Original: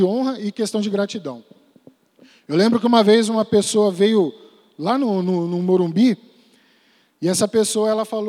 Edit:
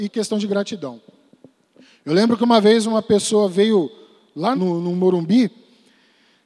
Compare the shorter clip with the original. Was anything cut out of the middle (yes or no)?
yes